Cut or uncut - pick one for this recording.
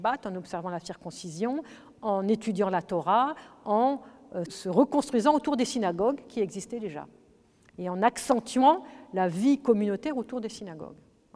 cut